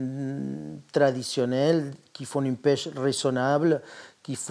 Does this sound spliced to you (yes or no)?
no